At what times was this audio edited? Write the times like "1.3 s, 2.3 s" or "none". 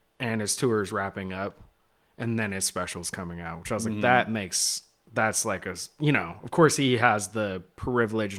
none